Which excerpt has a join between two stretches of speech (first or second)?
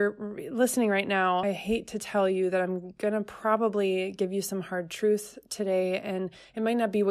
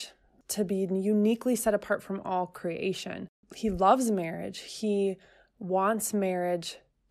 first